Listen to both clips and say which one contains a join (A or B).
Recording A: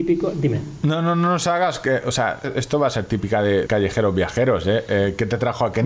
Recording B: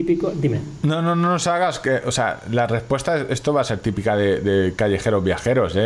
A